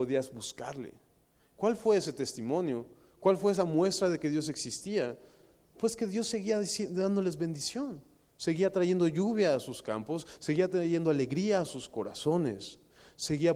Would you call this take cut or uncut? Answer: uncut